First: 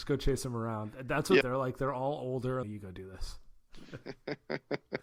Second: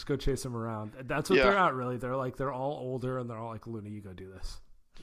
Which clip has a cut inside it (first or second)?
first